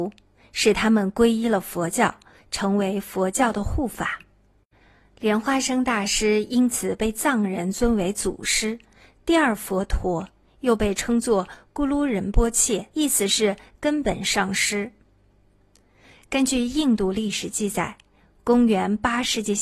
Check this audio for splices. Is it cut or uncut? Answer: cut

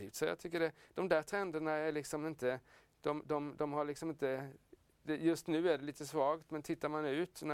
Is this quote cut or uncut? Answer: uncut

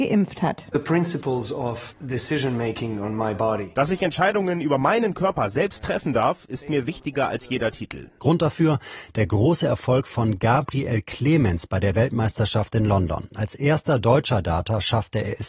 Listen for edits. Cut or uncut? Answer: cut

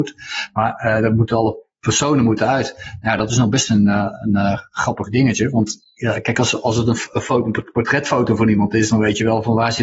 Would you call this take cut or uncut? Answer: uncut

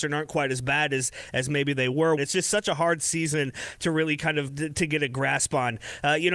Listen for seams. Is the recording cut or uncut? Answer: cut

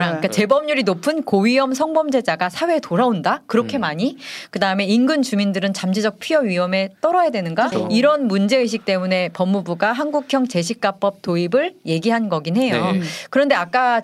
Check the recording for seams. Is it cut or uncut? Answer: cut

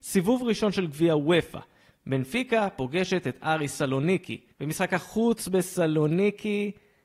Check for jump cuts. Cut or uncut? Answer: cut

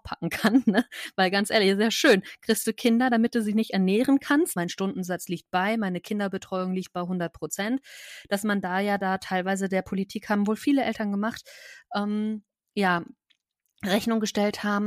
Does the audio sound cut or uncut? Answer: cut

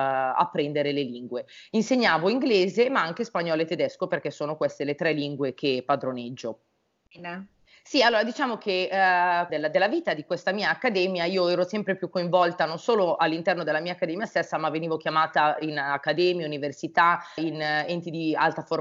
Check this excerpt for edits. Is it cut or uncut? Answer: cut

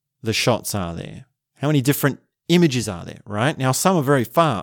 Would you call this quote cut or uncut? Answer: uncut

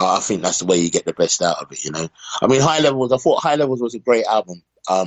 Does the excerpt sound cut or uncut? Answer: uncut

